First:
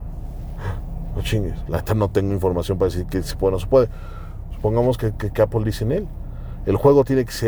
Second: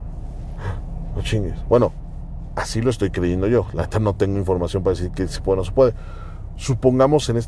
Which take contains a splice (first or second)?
first